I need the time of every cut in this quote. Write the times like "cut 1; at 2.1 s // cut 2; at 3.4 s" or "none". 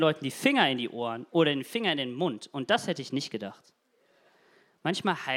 none